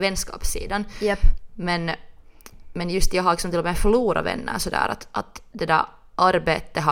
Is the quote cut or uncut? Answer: uncut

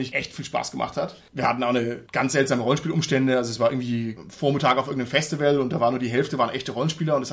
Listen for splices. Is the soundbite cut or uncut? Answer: uncut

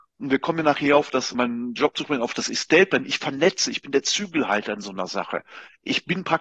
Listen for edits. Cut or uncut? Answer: cut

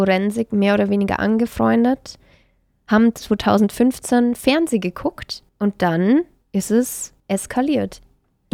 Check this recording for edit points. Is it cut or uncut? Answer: uncut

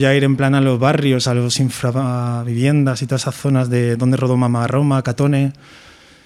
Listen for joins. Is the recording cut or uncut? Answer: uncut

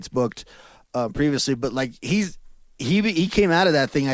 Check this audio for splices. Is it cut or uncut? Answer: uncut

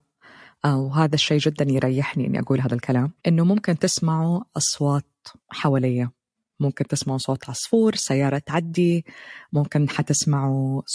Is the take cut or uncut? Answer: cut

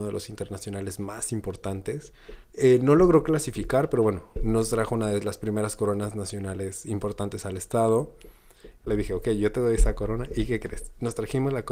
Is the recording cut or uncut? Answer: cut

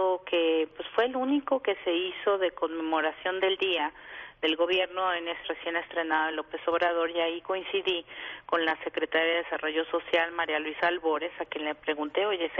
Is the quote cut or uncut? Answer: cut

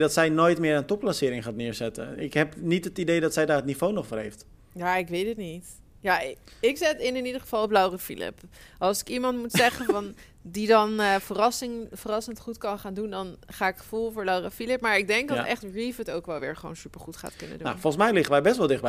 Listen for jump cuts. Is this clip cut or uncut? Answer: uncut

